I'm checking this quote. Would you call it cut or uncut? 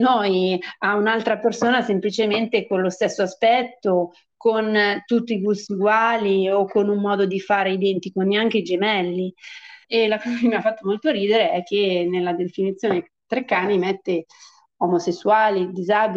cut